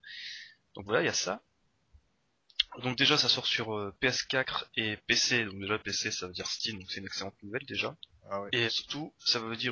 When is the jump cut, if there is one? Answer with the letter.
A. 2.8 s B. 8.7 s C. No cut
B